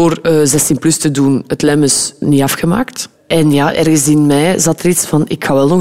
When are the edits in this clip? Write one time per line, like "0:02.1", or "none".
none